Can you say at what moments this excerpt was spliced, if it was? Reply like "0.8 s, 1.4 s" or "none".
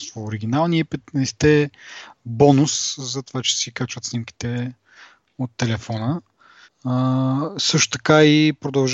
6.6 s